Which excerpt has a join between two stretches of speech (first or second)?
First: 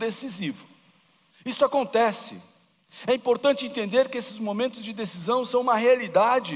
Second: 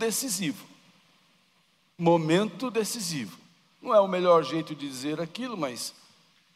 first